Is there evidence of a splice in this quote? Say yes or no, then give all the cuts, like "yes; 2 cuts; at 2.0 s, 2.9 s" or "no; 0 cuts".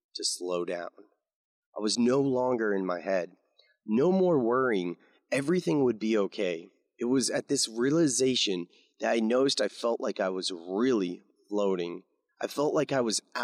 no; 0 cuts